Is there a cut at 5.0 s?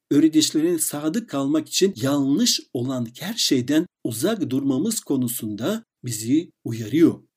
no; 0 cuts

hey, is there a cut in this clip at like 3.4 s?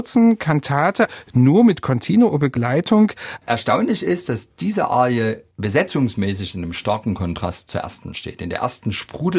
yes; 1 cut; at 3.4 s

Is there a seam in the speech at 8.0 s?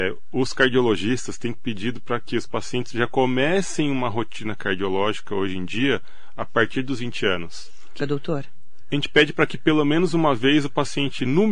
yes; 1 cut; at 8.0 s

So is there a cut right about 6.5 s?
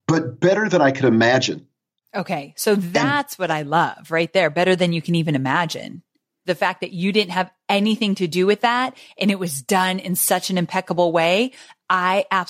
yes; 1 cut; at 6.5 s

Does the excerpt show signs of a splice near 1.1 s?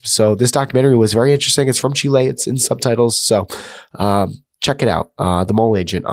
no; 1 cut; at 4.5 s

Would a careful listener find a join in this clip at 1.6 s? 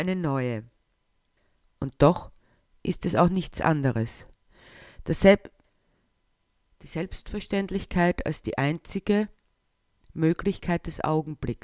yes; 1 cut; at 1.6 s

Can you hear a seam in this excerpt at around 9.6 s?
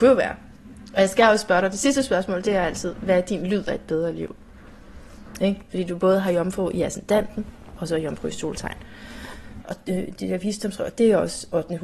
yes; 2 cuts; at 5.4 s, 9.6 s

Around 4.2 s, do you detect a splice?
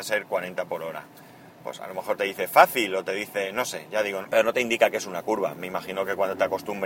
yes; 1 cut; at 4.2 s

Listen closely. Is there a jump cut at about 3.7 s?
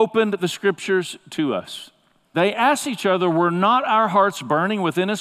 no; 1 cut; at 2.3 s

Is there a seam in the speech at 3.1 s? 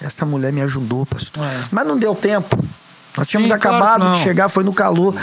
no; 1 cut; at 1.4 s

